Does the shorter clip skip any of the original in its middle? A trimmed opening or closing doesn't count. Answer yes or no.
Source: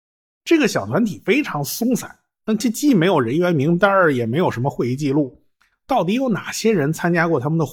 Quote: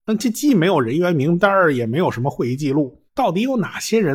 yes